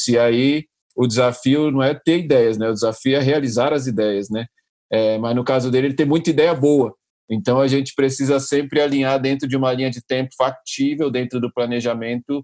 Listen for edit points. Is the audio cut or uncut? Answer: uncut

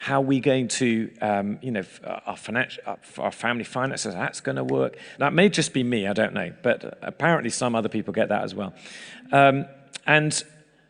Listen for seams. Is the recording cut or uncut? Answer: cut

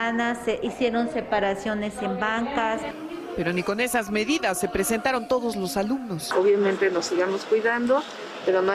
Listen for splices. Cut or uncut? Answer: uncut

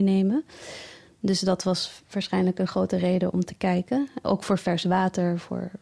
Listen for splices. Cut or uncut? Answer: cut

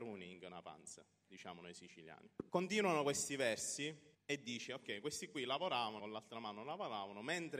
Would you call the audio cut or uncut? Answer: cut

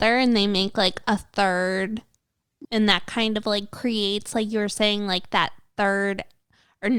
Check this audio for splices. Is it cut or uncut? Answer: cut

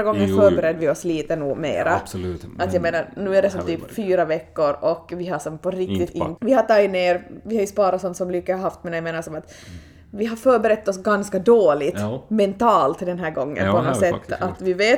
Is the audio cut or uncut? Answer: cut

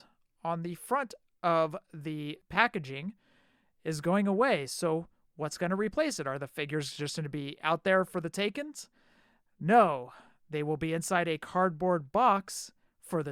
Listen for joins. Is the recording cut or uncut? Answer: uncut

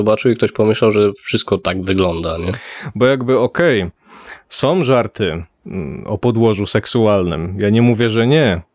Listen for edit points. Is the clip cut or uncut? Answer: uncut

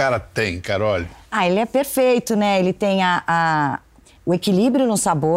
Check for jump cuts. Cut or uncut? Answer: uncut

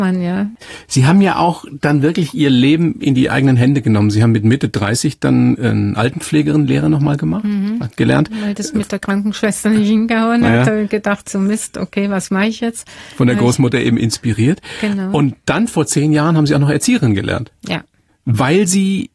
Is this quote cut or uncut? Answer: uncut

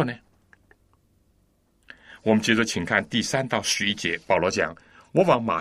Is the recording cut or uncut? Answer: uncut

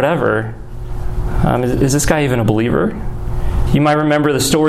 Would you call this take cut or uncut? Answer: cut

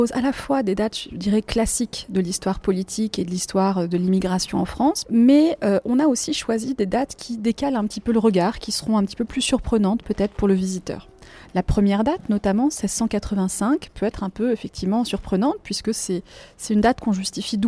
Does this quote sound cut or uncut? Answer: cut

